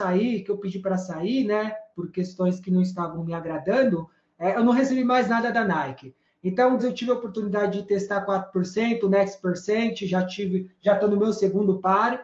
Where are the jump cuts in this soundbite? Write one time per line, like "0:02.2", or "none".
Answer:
0:06.8